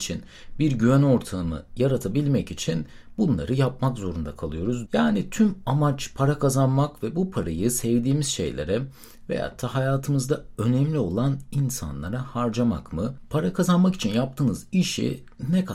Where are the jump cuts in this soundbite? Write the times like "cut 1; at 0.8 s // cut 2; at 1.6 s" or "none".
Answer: cut 1; at 4.9 s